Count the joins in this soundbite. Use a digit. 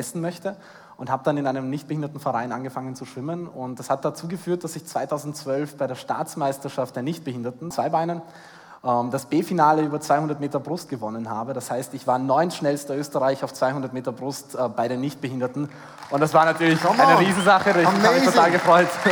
1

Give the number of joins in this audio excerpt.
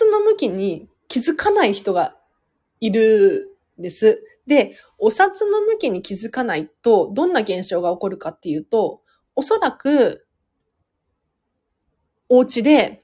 0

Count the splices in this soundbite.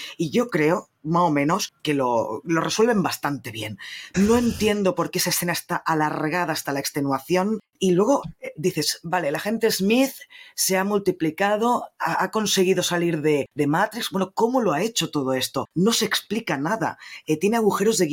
2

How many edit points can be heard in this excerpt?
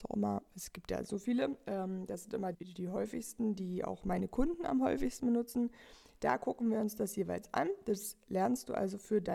1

